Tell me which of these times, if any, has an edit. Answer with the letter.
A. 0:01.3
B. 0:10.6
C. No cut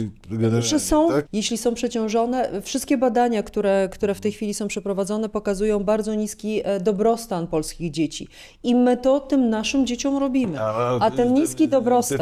A